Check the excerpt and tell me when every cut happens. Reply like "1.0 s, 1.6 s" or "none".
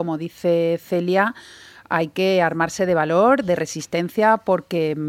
none